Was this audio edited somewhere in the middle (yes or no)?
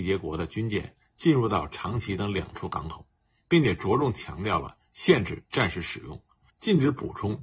yes